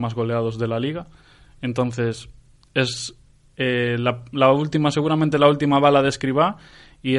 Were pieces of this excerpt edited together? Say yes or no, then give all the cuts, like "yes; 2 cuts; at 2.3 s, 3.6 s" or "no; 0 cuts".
no; 0 cuts